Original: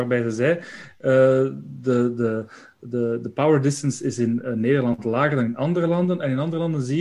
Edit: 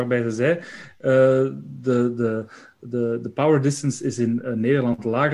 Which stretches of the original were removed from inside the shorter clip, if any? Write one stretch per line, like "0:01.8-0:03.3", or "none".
none